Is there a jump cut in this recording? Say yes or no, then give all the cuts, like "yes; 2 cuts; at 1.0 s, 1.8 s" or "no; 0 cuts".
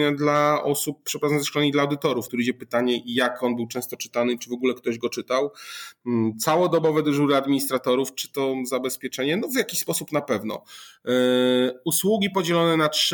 yes; 1 cut; at 2.3 s